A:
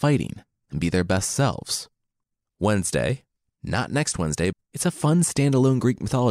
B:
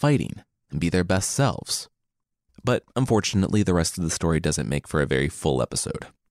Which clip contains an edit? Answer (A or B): A